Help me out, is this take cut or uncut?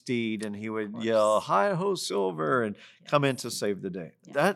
uncut